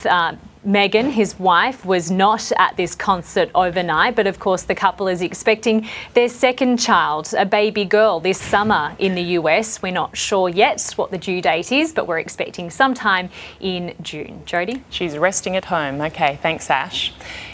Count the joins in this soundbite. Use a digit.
0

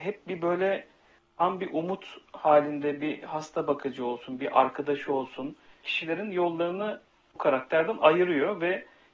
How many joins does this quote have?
1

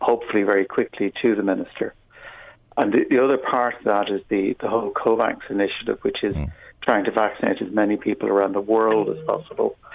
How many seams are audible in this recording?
0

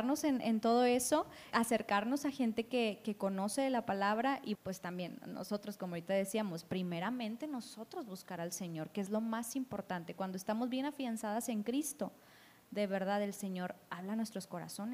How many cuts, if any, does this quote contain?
2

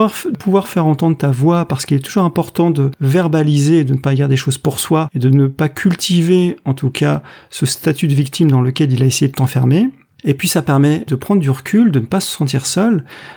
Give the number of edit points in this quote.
0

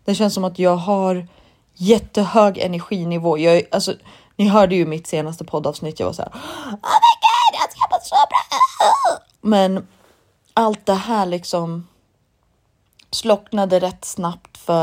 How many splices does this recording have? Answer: 0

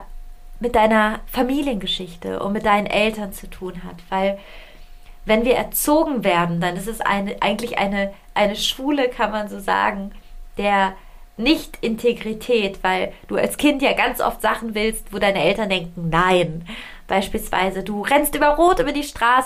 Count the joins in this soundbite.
0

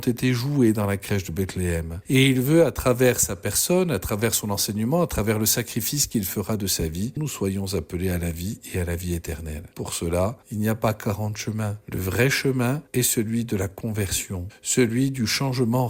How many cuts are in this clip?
2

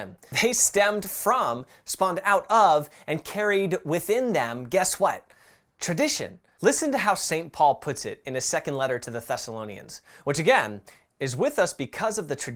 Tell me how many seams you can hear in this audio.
0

